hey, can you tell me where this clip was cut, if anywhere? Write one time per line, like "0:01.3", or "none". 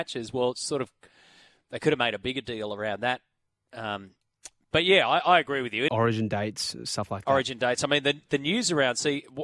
0:05.9